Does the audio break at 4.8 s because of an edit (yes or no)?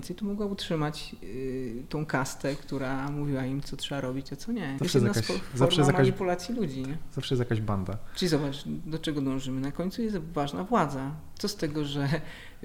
yes